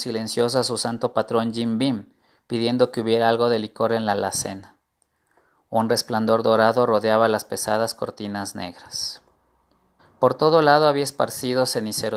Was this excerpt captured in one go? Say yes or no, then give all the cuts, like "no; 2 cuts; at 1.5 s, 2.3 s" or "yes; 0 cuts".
no; 1 cut; at 10.0 s